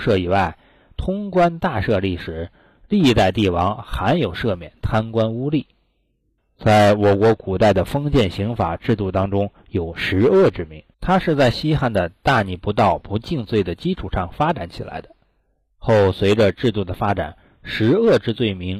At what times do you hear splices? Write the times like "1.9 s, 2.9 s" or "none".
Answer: 6.4 s, 10.9 s